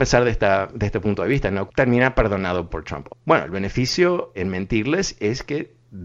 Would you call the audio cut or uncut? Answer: cut